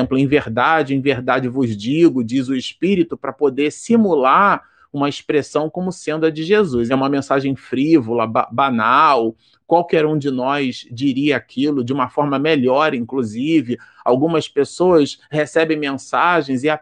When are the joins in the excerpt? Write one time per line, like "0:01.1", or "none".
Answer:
0:06.9